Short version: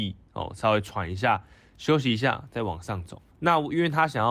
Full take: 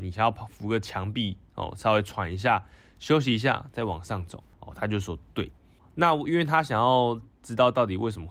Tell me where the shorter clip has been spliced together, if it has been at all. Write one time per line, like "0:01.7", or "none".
0:03.3